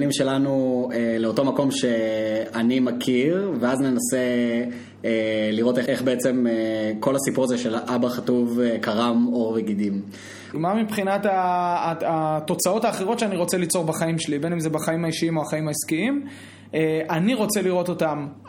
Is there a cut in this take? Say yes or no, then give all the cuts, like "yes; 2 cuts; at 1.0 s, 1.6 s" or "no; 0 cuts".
yes; 2 cuts; at 5.9 s, 10.5 s